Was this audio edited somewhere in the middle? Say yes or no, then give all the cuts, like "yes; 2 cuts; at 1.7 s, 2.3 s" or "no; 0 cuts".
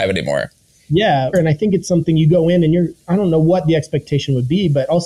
yes; 1 cut; at 1.3 s